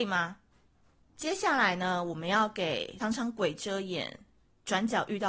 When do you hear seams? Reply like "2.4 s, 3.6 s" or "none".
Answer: 1.2 s, 3.0 s